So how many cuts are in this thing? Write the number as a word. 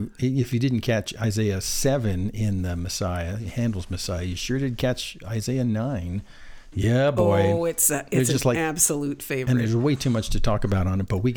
one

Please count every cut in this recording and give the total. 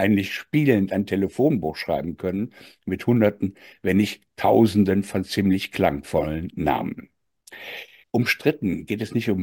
one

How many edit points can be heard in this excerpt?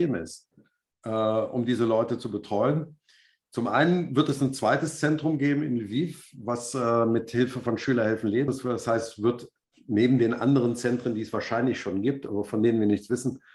one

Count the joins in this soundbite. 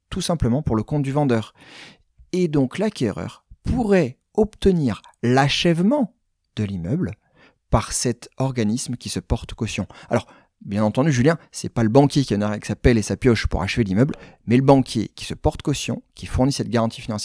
zero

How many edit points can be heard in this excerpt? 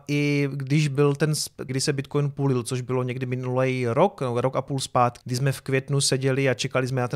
two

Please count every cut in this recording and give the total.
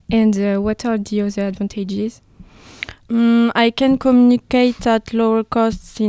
zero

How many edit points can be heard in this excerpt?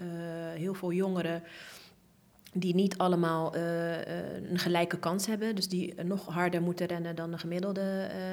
zero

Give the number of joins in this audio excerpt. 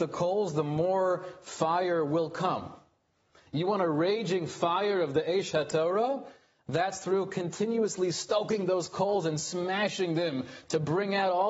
zero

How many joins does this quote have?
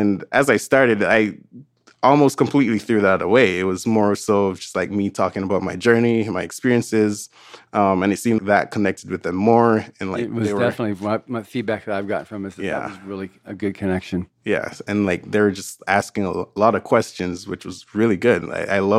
one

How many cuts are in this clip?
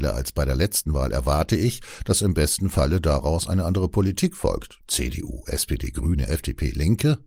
one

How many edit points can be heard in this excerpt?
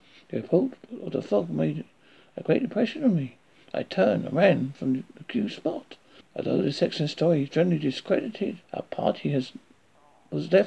three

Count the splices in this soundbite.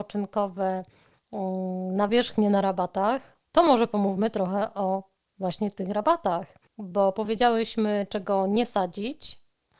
one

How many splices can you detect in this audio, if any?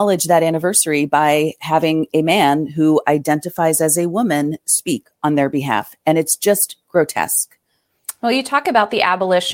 zero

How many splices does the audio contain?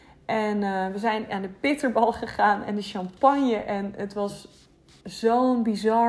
zero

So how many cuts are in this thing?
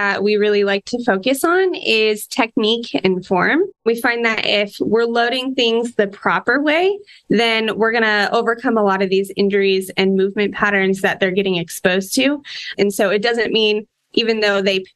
one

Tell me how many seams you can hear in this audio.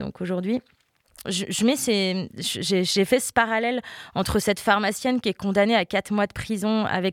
one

